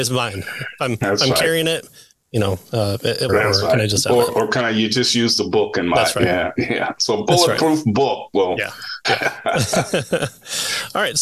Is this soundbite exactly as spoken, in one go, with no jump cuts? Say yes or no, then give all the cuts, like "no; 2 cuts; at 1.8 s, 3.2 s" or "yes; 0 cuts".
no; 2 cuts; at 3.3 s, 9.0 s